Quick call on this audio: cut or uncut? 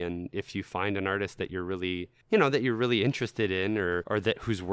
cut